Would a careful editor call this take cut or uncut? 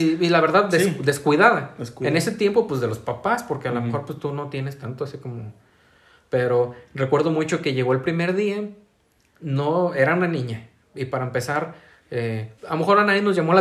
cut